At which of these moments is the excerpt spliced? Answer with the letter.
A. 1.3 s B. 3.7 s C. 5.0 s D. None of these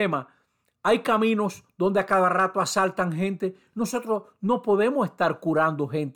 D